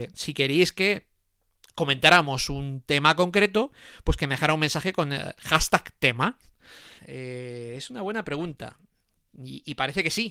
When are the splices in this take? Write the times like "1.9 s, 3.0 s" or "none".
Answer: 7.0 s